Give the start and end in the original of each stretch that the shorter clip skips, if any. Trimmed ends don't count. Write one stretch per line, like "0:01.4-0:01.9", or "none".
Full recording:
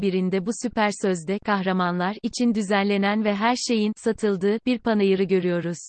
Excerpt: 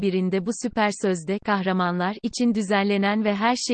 none